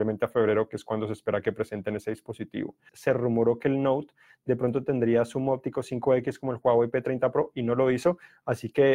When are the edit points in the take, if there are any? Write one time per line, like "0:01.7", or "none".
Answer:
0:02.9